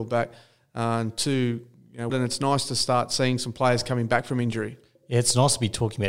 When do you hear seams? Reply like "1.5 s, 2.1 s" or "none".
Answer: 2.1 s